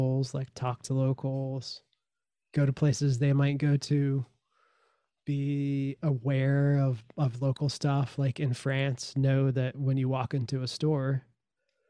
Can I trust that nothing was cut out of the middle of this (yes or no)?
yes